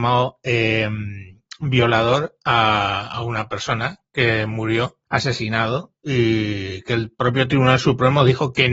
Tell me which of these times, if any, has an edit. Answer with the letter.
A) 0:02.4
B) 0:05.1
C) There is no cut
B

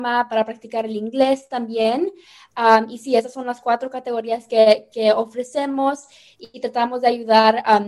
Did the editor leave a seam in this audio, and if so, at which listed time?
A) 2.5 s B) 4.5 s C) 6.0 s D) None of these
D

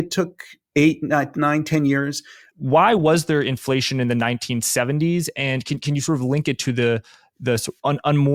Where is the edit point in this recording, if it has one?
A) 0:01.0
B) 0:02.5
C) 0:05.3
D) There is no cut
B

